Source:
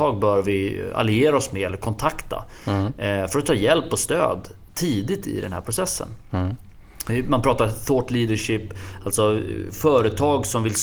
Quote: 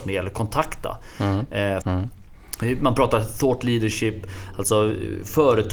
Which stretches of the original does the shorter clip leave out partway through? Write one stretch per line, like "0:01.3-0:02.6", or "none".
0:03.3-0:06.3